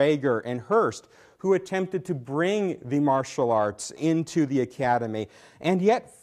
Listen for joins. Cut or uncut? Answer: cut